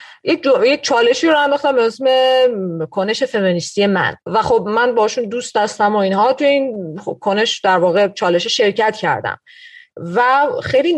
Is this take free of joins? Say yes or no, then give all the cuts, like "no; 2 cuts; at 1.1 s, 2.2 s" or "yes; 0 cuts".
no; 1 cut; at 4.2 s